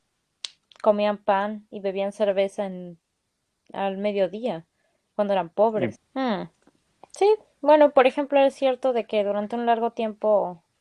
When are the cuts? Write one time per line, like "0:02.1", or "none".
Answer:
0:05.9